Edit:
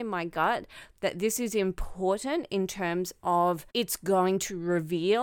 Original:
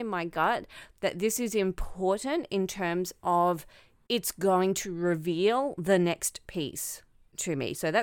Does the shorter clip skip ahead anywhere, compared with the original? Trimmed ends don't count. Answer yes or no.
yes